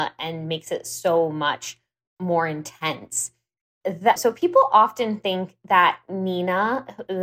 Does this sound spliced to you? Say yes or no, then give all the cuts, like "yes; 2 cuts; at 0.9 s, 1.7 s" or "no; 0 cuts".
yes; 1 cut; at 4.2 s